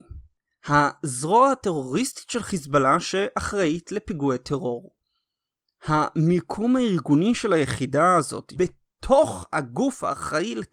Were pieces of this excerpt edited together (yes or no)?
yes